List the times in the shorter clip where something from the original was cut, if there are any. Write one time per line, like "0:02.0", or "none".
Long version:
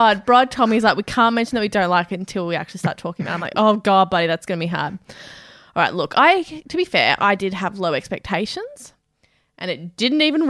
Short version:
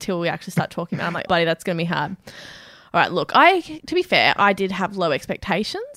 0:01.3